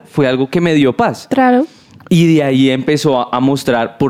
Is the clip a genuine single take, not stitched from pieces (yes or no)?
yes